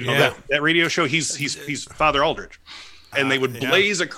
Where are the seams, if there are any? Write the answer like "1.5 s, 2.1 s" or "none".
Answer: 3.1 s